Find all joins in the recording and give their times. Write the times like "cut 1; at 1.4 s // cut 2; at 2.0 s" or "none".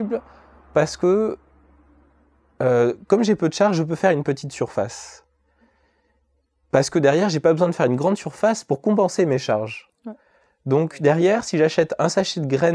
none